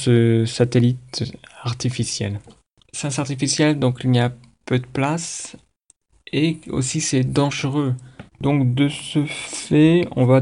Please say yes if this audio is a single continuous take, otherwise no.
no